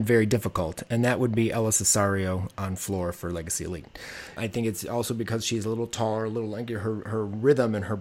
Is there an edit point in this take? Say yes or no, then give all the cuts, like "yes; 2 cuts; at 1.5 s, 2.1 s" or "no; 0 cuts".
yes; 1 cut; at 4.4 s